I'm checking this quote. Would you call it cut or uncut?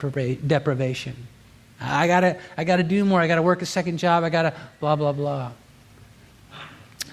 uncut